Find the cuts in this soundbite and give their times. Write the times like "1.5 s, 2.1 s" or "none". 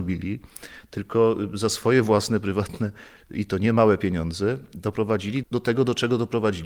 5.4 s